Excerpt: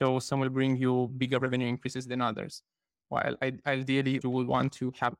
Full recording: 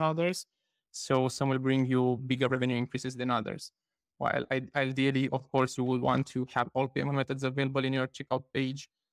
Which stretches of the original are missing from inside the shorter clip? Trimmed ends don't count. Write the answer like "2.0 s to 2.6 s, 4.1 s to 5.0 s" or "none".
5.3 s to 5.8 s